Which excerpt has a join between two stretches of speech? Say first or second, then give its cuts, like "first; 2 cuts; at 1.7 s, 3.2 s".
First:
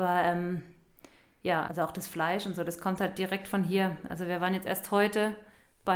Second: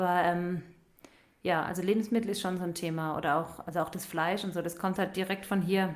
first; 1 cut; at 1.7 s